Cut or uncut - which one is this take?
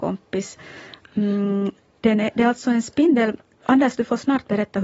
uncut